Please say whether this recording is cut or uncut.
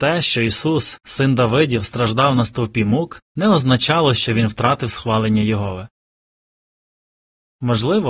uncut